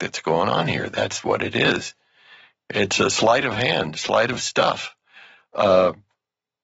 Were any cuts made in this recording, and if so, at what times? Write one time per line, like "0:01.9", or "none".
none

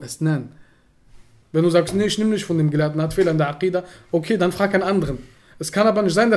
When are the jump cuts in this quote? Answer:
0:01.4

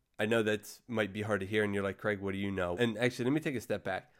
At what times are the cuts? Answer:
0:02.7

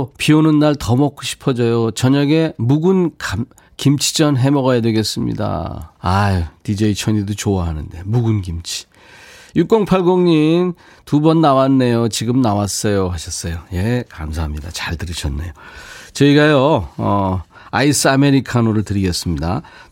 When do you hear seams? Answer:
0:06.0

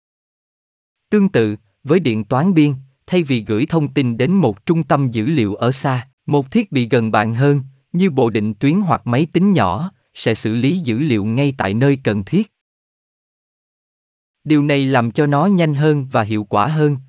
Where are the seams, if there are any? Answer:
0:06.2

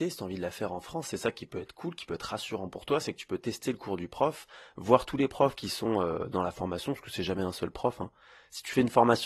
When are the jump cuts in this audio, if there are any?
none

